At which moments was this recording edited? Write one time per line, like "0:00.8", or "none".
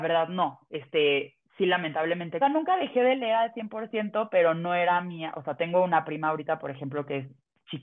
0:02.4

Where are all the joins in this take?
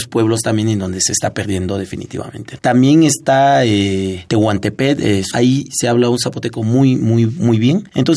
0:02.6
0:05.3

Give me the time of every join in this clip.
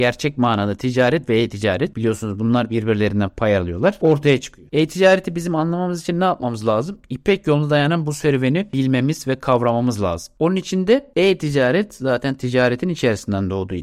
none

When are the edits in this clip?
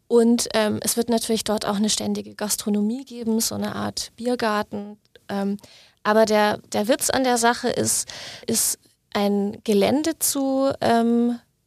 0:08.4

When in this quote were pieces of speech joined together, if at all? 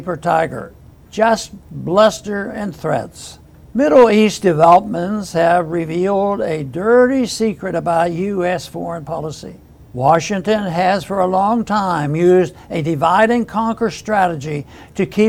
none

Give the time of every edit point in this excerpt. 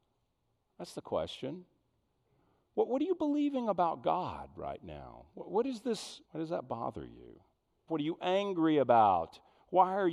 0:06.2
0:07.9

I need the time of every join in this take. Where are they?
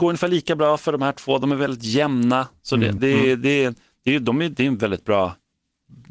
0:03.0

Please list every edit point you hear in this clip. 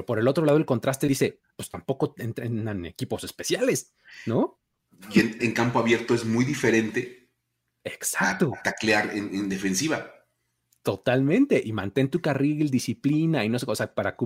0:05.4

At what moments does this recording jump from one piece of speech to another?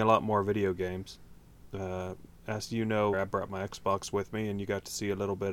0:03.1

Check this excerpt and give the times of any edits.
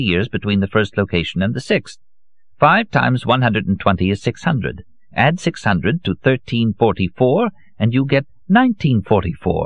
none

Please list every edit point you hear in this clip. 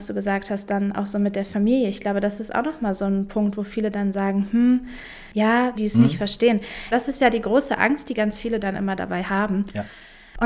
0:05.7
0:06.9

